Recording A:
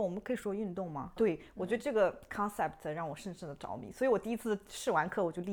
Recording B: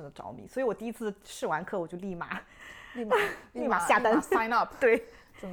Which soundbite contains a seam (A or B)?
A